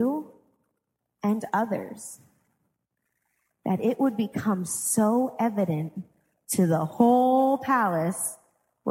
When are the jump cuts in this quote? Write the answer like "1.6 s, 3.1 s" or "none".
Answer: none